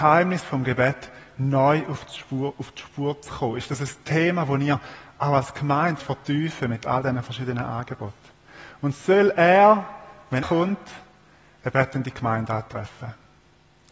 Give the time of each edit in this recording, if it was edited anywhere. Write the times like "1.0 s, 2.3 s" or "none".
6.0 s, 10.4 s

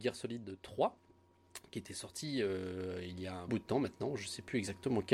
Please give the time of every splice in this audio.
3.5 s

